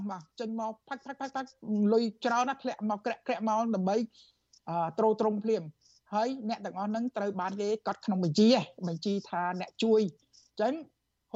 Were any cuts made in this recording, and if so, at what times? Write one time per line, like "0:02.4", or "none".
none